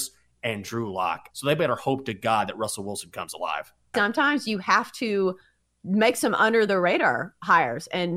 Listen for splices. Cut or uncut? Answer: cut